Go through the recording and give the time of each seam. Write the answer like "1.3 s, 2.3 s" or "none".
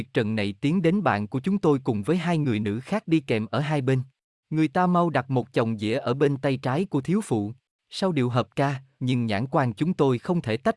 4.4 s, 7.7 s, 9.0 s